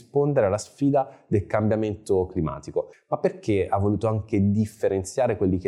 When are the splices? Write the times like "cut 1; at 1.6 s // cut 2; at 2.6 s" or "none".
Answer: cut 1; at 2.9 s